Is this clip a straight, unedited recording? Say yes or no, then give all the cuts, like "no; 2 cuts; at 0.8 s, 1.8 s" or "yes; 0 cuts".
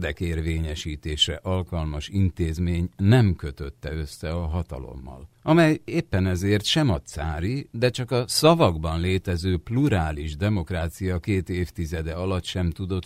no; 2 cuts; at 5.3 s, 7.7 s